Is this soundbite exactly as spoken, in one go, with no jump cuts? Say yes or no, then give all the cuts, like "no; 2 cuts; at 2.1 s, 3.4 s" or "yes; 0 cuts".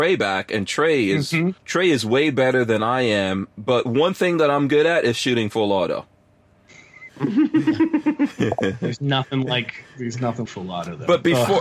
no; 3 cuts; at 1.6 s, 7.1 s, 10.5 s